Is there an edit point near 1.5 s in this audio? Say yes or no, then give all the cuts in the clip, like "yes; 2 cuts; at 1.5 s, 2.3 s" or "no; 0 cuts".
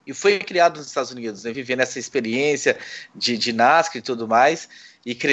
no; 0 cuts